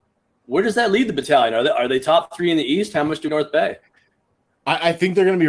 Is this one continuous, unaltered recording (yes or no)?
no